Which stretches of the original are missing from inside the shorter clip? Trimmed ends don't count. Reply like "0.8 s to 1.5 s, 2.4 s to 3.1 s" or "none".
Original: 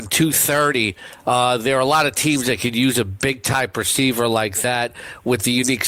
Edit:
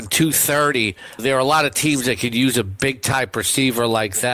1.2 s to 1.6 s